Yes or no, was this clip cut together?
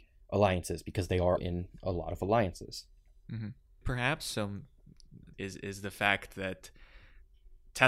yes